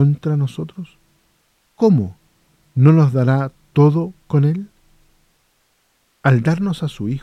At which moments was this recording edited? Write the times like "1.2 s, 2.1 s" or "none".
1.7 s